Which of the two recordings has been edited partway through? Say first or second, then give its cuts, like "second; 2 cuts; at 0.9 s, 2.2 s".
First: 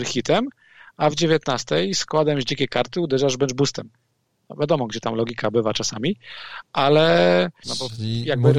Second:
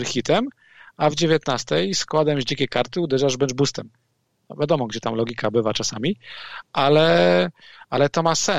first; 1 cut; at 7.6 s